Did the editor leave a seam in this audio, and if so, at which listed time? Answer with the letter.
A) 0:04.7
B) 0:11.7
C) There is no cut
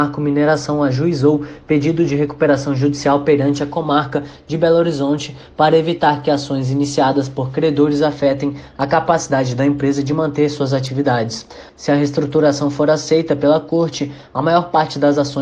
B